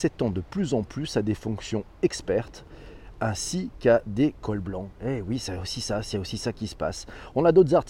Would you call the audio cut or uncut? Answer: uncut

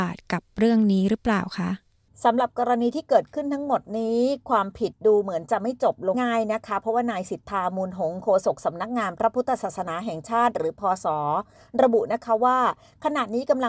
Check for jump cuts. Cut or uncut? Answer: cut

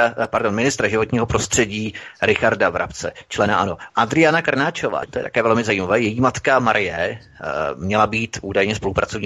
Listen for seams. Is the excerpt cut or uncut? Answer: cut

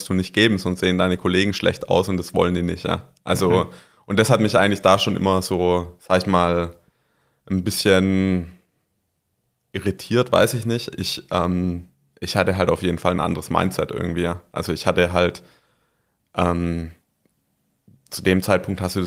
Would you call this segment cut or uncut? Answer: uncut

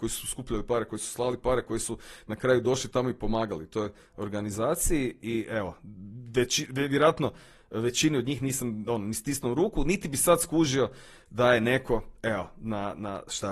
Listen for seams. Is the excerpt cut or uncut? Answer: uncut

